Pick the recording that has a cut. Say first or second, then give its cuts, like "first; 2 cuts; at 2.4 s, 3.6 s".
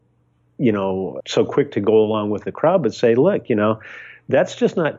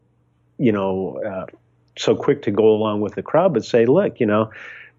first; 1 cut; at 1.2 s